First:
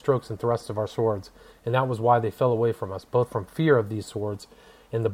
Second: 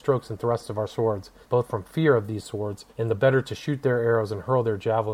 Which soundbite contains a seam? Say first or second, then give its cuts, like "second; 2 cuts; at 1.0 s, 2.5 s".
second; 2 cuts; at 1.4 s, 2.9 s